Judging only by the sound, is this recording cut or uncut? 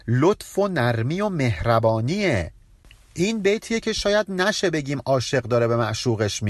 uncut